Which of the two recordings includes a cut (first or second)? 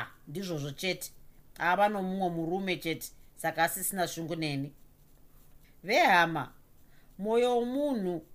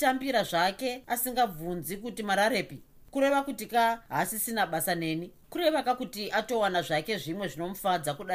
second